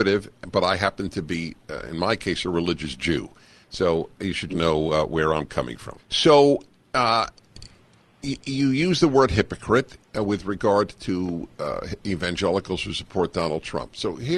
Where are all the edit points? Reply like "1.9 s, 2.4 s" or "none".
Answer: 4.5 s, 6.0 s